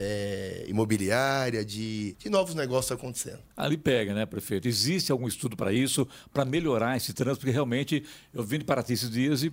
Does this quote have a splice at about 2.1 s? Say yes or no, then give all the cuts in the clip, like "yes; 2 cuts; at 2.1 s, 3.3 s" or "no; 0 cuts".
yes; 2 cuts; at 2.1 s, 3.5 s